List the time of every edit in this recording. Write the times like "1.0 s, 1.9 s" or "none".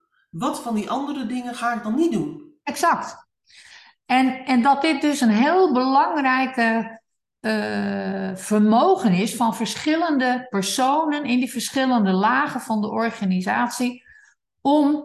none